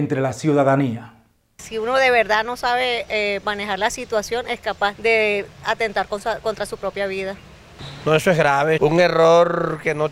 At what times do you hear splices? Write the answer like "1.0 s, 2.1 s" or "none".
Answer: 4.9 s, 8.8 s

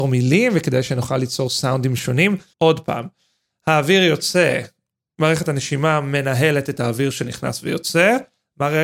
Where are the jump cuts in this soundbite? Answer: 2.5 s

